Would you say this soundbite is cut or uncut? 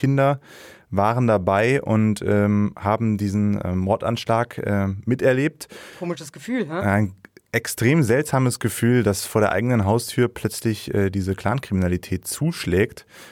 cut